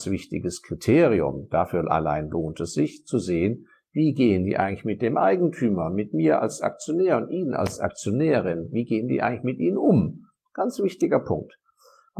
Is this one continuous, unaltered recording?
yes; 0 cuts

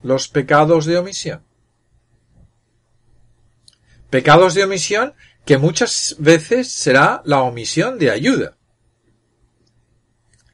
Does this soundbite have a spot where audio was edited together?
no; 0 cuts

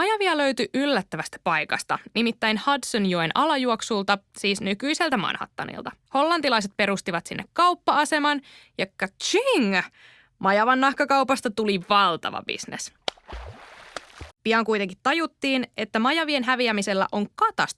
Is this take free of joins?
no; 2 cuts; at 6.1 s, 14.3 s

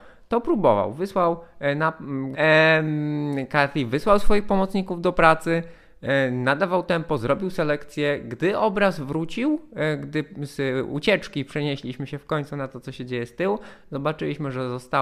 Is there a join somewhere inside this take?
yes; 1 cut; at 2.3 s

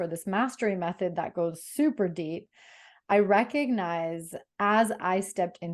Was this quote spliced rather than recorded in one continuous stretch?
no; 0 cuts

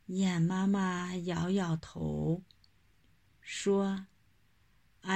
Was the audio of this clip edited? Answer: no; 0 cuts

